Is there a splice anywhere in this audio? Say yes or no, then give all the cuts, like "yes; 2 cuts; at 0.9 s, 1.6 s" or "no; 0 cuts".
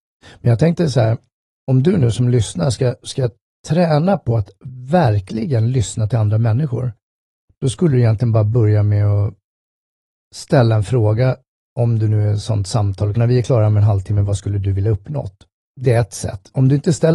yes; 1 cut; at 13.2 s